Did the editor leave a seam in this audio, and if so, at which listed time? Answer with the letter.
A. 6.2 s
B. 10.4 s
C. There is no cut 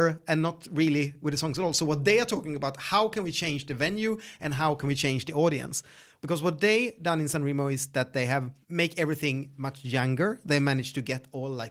A